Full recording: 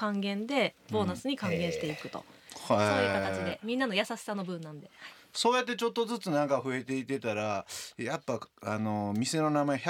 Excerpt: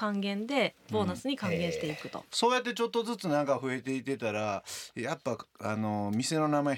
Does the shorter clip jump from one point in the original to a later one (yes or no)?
yes